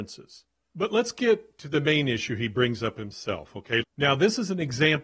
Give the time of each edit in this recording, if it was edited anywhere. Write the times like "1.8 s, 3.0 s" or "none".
3.8 s